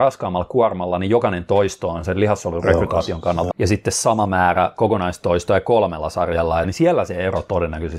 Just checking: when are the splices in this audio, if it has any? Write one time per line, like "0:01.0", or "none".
0:03.5
0:06.6